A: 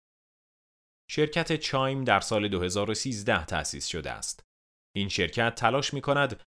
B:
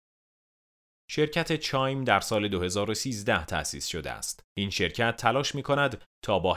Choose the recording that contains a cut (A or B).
B